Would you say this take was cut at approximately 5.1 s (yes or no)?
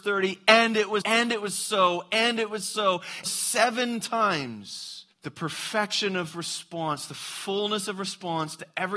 yes